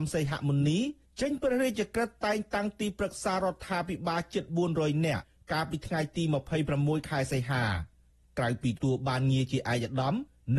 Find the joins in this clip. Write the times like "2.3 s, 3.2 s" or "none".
8.8 s